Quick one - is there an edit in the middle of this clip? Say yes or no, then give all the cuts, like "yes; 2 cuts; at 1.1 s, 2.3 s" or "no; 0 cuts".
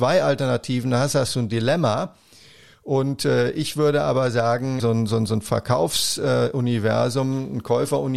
yes; 1 cut; at 4.8 s